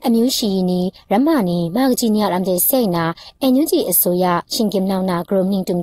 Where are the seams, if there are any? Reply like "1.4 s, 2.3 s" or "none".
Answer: none